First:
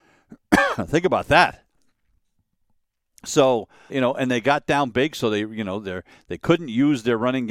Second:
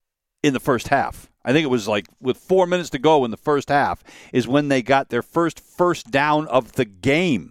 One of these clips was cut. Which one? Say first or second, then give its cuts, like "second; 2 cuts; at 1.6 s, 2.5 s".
first; 1 cut; at 3.9 s